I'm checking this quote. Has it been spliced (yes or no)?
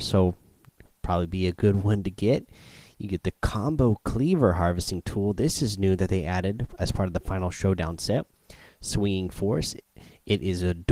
no